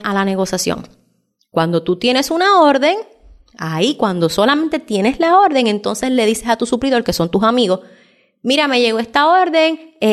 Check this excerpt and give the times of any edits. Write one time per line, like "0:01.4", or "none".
none